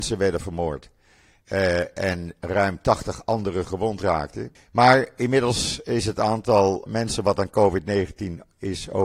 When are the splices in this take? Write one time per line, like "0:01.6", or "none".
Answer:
0:04.6
0:06.9